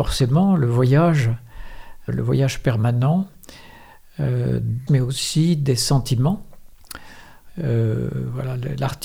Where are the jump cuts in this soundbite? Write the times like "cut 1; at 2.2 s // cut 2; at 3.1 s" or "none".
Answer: cut 1; at 2.1 s // cut 2; at 4.9 s // cut 3; at 7.5 s